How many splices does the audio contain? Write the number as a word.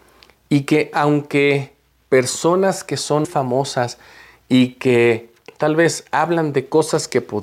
one